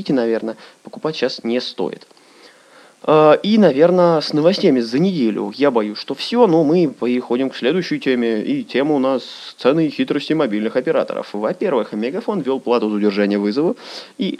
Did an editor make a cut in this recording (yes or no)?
no